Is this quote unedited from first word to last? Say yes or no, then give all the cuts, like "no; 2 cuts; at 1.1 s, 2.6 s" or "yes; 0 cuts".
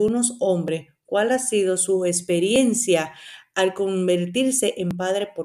yes; 0 cuts